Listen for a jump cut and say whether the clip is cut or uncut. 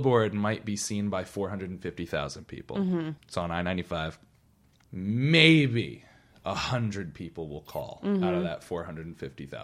cut